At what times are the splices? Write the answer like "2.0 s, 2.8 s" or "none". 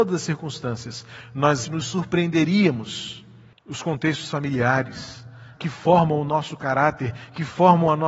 1.6 s, 3.5 s, 5.5 s